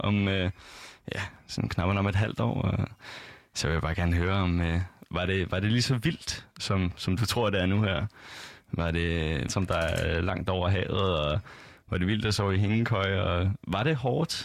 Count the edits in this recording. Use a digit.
1